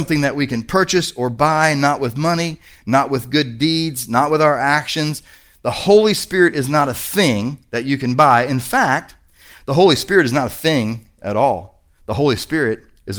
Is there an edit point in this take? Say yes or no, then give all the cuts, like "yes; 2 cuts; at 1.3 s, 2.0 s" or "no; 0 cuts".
no; 0 cuts